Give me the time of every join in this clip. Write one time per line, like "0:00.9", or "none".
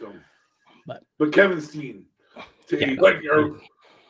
0:01.1
0:03.0